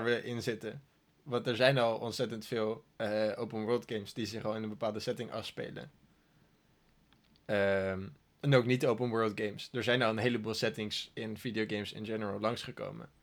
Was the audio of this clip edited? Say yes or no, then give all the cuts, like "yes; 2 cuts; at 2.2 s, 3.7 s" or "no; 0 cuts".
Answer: yes; 1 cut; at 2.9 s